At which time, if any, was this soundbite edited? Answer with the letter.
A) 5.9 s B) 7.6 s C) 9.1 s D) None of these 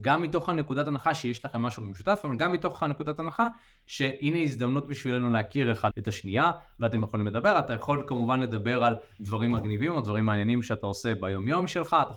A